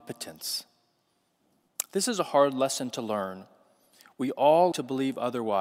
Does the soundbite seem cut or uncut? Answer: cut